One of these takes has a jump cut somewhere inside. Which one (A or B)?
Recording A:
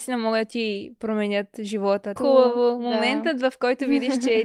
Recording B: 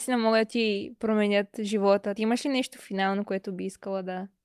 A